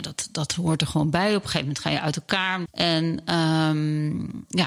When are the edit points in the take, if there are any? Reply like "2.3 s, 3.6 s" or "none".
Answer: 2.7 s